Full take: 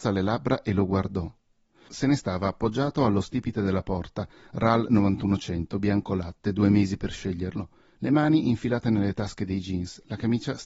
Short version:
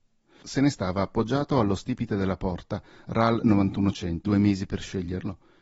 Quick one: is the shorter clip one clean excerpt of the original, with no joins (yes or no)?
no